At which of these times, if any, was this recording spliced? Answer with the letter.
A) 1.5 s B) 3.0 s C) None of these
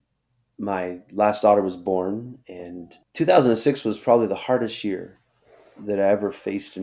B